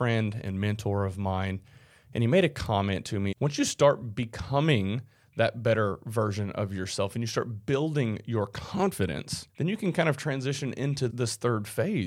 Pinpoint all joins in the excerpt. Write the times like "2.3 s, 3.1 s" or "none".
3.3 s, 9.5 s, 11.1 s